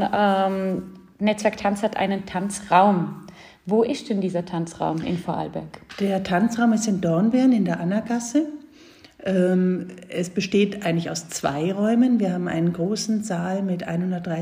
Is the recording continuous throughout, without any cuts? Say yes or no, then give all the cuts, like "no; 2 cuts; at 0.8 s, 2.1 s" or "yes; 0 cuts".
yes; 0 cuts